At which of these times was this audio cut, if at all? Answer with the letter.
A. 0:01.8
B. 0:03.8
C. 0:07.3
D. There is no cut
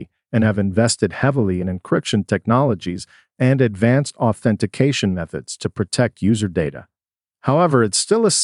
D